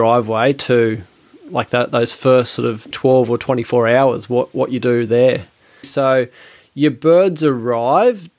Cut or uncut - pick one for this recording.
cut